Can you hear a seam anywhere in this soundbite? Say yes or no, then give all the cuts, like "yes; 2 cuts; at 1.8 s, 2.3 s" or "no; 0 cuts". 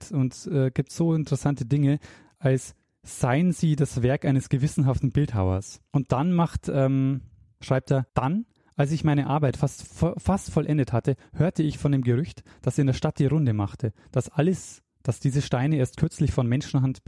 no; 0 cuts